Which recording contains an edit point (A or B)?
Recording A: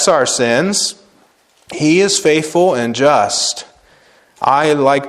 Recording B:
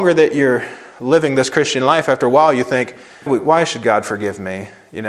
B